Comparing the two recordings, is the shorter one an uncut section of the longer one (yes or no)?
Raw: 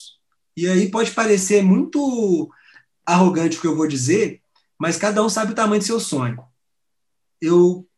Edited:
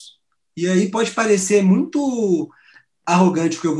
yes